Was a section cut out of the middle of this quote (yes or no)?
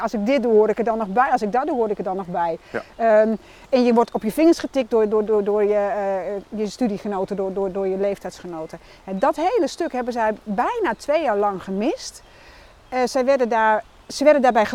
no